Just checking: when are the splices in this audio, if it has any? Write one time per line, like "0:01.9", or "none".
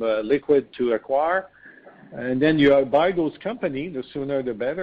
none

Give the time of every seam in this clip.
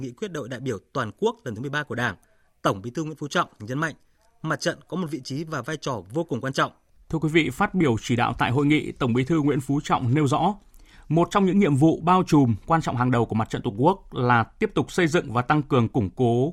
0:07.0

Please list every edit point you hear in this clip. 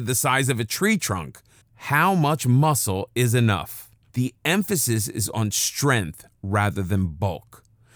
0:01.6
0:04.1

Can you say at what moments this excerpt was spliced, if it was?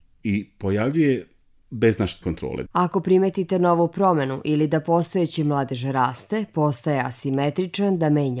0:02.7

